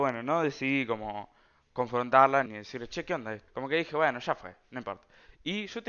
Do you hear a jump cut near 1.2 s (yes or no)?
no